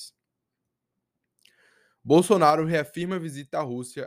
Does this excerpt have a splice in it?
no; 0 cuts

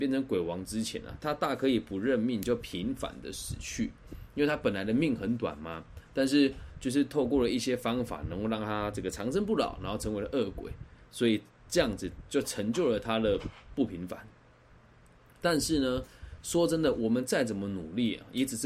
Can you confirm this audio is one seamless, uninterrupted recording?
yes; 0 cuts

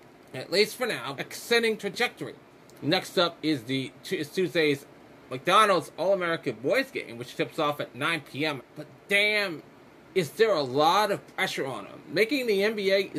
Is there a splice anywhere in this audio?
yes; 3 cuts; at 1.2 s, 2.7 s, 8.6 s

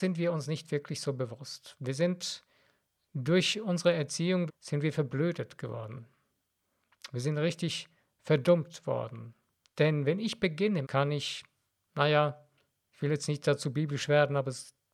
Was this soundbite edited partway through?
yes; 3 cuts; at 4.5 s, 9.6 s, 10.8 s

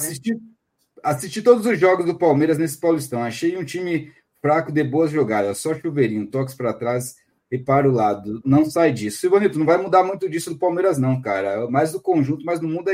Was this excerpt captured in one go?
yes; 0 cuts

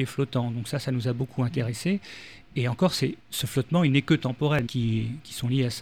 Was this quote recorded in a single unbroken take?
no; 2 cuts; at 3.2 s, 4.7 s

